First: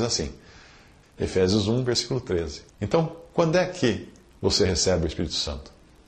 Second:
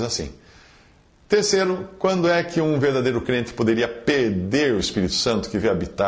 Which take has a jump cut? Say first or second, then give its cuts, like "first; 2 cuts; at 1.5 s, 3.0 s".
first; 2 cuts; at 1.0 s, 2.7 s